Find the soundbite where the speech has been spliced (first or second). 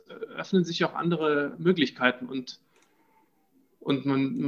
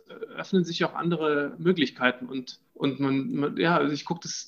second